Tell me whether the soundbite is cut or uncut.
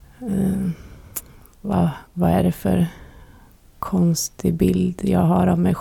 uncut